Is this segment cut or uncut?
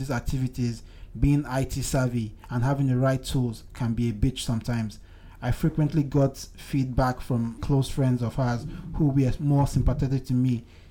cut